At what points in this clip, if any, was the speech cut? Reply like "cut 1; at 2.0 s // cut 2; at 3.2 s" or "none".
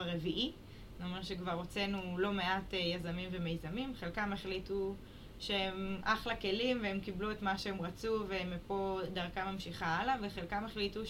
none